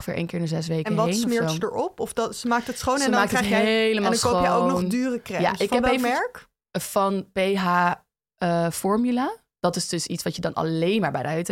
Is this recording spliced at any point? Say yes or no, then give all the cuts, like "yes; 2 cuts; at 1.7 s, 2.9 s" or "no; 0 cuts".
no; 0 cuts